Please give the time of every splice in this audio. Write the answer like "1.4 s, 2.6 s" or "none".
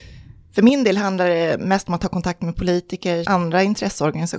3.3 s